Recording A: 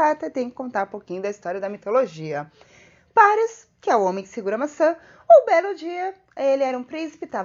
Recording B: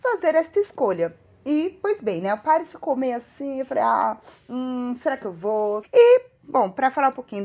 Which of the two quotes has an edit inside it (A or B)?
B